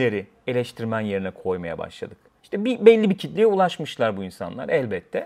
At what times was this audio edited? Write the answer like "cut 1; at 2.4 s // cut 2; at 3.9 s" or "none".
cut 1; at 2.4 s